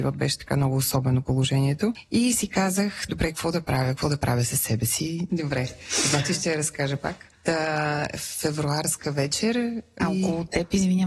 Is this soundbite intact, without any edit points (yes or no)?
no